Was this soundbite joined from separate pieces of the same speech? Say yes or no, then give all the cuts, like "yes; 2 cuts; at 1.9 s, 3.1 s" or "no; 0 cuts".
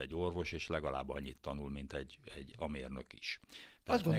yes; 1 cut; at 2.5 s